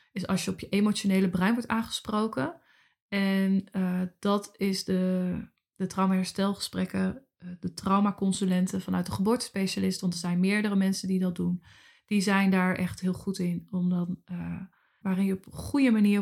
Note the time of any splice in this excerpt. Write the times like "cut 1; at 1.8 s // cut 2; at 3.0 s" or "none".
cut 1; at 15.0 s